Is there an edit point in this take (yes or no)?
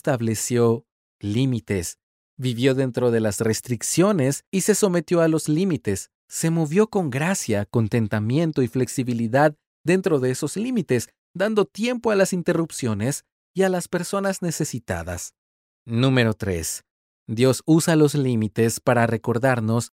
no